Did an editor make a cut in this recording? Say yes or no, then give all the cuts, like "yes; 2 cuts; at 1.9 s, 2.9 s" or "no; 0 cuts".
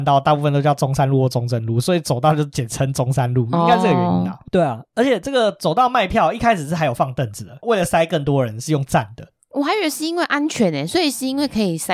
yes; 2 cuts; at 4.5 s, 7.6 s